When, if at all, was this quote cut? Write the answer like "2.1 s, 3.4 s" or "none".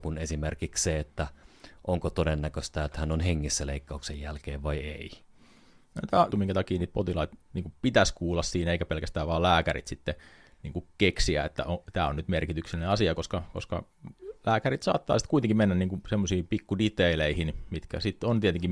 6.3 s